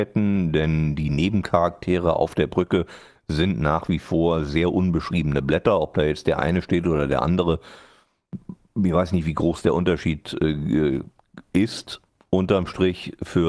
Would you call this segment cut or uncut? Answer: uncut